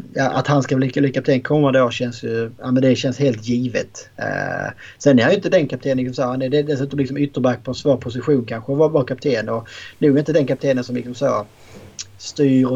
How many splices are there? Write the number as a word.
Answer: zero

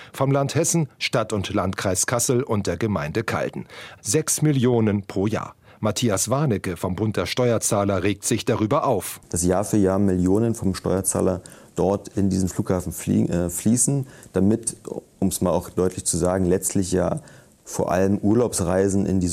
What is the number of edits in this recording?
one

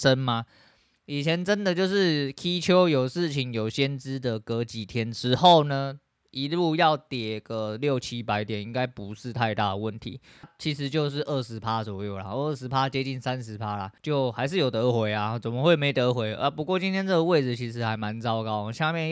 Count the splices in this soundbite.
two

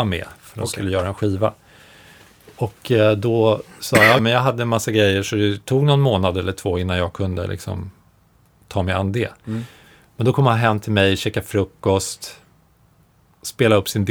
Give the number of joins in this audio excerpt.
one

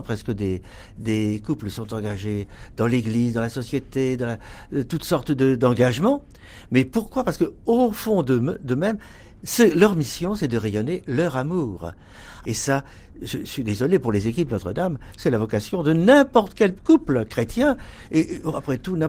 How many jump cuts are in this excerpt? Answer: one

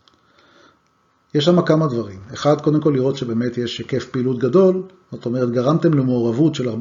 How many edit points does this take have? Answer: zero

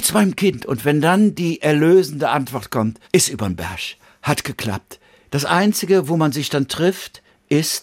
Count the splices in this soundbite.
two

